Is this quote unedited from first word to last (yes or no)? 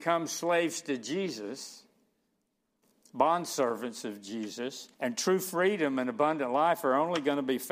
no